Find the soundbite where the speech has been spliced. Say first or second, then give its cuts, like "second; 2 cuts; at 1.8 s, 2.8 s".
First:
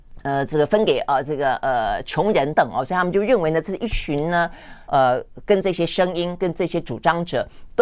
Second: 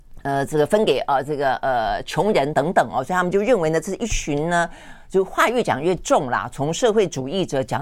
first; 2 cuts; at 2.5 s, 4.9 s